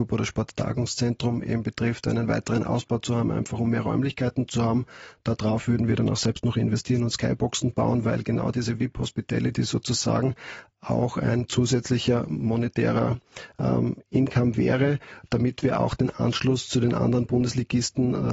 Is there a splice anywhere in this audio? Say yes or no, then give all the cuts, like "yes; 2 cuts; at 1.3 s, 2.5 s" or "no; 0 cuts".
no; 0 cuts